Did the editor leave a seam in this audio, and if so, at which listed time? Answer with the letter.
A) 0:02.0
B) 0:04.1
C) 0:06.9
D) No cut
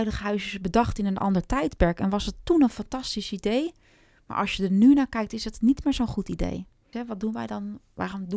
C